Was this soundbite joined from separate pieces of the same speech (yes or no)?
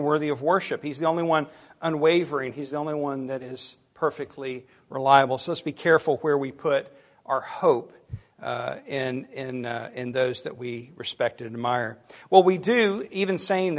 no